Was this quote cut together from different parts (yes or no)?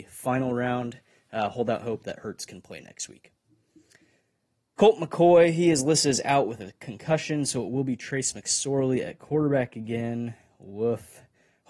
no